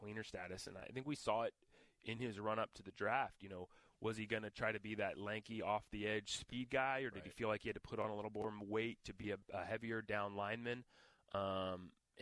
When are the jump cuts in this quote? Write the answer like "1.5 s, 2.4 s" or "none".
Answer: none